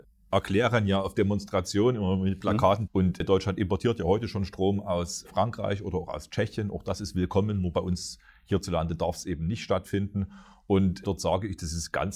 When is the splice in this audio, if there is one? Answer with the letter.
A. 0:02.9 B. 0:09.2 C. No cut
A